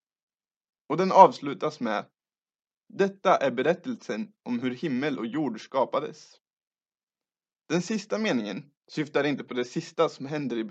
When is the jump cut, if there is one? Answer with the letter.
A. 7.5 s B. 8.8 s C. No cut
B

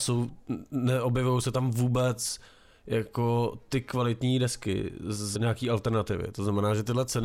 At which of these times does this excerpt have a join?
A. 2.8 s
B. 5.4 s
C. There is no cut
B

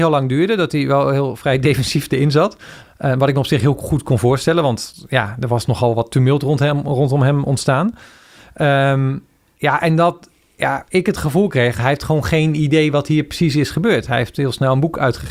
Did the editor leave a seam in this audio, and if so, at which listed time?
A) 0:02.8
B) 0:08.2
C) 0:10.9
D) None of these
A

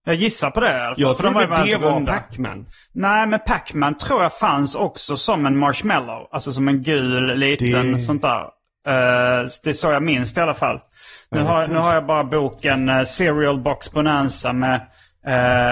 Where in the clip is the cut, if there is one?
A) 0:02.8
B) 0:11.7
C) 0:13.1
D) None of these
D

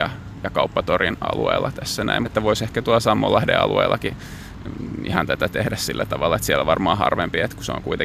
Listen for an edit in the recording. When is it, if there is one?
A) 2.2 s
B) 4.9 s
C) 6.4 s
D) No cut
A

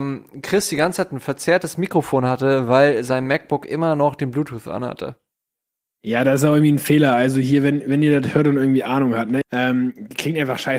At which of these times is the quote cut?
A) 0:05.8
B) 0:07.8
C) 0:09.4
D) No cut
C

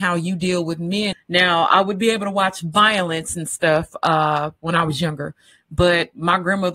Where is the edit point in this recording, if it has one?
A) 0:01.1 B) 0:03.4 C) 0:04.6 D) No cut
A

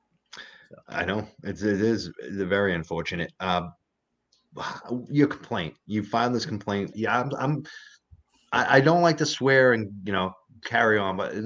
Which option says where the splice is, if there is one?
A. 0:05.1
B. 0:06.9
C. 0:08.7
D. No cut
B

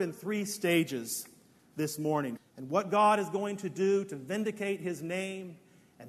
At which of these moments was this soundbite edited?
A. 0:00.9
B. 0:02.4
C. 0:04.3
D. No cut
B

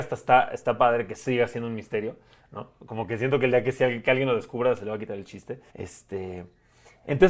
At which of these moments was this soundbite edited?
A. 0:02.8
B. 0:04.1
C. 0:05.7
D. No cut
C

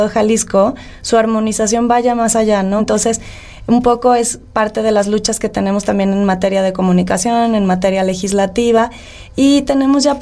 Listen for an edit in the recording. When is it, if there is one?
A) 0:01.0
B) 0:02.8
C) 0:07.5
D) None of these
B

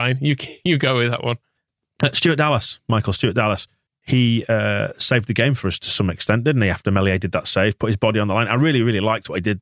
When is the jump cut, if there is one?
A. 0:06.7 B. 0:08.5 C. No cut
C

